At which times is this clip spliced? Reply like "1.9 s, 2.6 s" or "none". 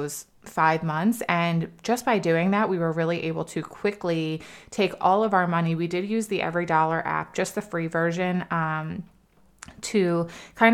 none